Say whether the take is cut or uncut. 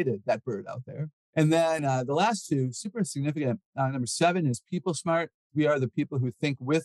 uncut